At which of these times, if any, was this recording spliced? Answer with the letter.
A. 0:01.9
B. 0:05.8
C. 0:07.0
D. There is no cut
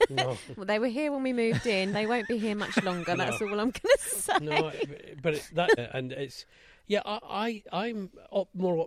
B